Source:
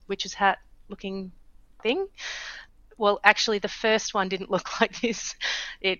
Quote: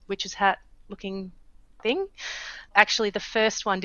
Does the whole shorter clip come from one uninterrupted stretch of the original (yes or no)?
no